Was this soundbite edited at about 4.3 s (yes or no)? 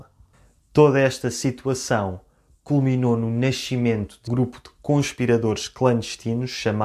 yes